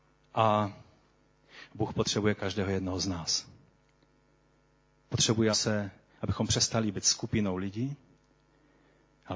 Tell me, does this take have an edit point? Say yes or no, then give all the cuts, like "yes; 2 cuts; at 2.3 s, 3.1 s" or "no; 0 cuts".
yes; 1 cut; at 5.5 s